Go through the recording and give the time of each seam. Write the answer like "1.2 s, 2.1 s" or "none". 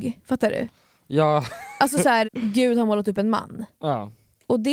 2.2 s